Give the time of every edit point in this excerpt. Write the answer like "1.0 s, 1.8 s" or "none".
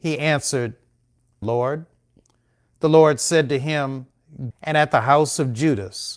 1.4 s, 4.5 s